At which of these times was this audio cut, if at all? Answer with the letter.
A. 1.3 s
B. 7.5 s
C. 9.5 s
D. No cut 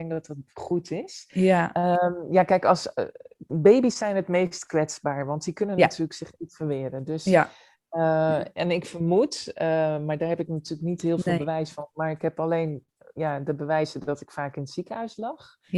D